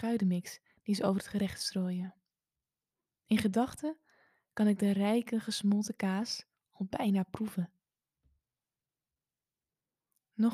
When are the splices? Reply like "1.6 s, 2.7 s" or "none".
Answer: none

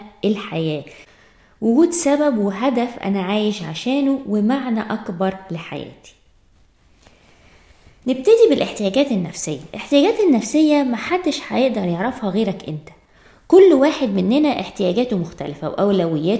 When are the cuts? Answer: none

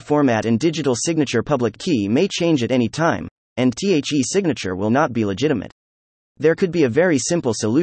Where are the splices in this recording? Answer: 3.4 s

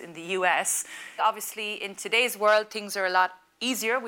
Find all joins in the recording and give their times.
1.2 s

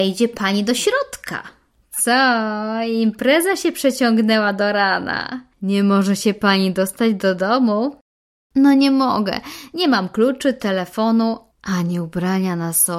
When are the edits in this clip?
1.8 s

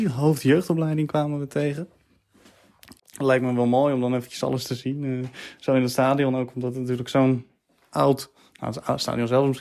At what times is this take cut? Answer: 3.0 s

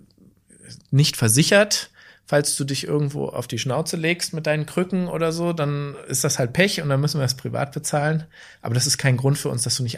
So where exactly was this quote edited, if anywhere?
none

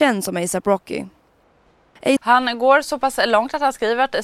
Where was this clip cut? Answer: 2.2 s

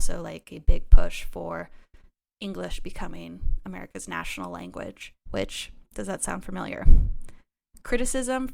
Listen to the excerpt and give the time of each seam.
5.2 s

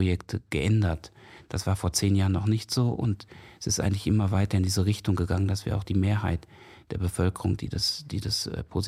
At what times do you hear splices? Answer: none

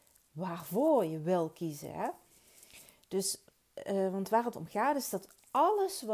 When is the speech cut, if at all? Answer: none

